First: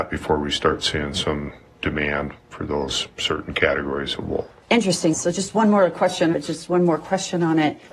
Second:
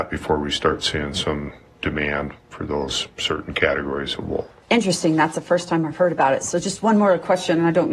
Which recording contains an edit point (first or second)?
first